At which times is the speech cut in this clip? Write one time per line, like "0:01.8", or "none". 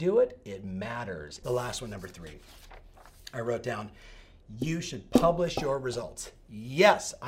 0:01.4

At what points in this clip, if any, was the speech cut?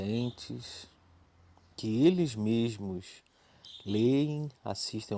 none

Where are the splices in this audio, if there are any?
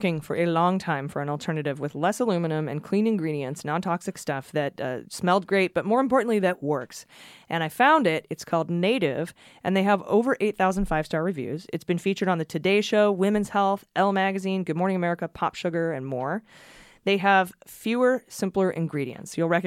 none

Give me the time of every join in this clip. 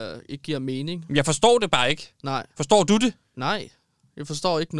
none

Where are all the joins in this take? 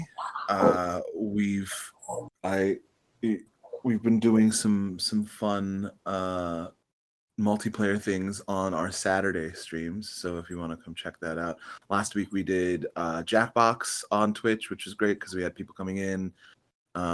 none

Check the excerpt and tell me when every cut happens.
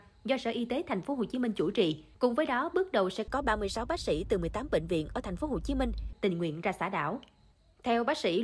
0:02.1

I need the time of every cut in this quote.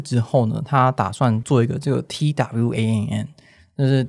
0:01.4

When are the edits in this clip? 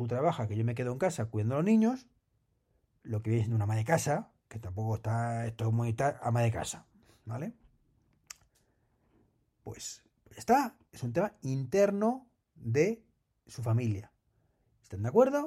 none

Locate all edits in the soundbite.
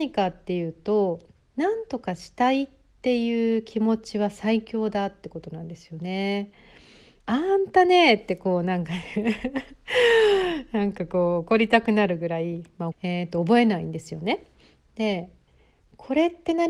0:07.2
0:12.9

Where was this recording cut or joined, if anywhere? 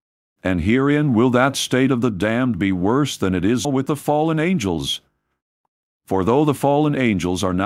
0:03.6

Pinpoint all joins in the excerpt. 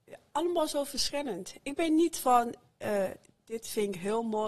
0:03.4

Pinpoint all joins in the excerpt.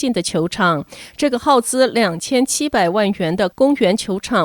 none

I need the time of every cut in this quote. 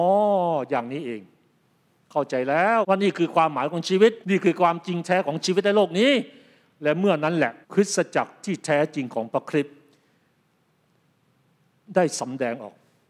0:02.8
0:04.2
0:07.6

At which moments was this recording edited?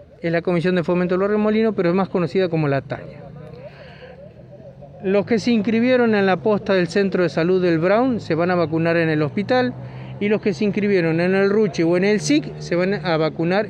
none

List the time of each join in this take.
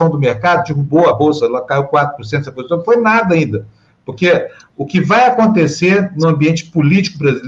none

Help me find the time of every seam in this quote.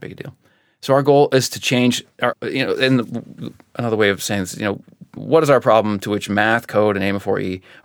0:02.3
0:05.2

